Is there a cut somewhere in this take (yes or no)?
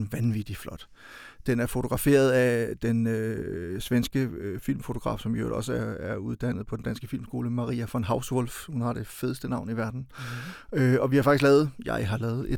no